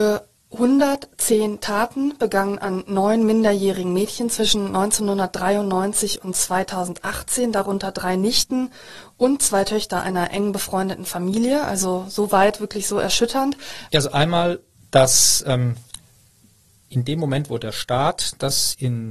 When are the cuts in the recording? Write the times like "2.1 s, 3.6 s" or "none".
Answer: 13.9 s